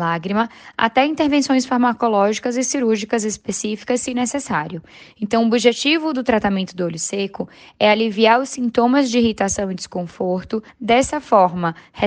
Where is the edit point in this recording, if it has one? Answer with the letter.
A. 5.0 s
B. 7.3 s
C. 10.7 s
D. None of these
C